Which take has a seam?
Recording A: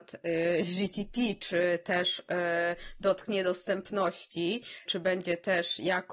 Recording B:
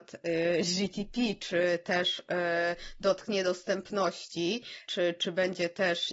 A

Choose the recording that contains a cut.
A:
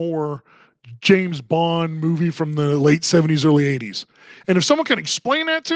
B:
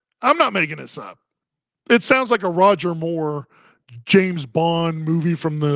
A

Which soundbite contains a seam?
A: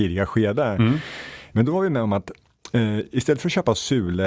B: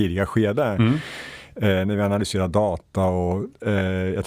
A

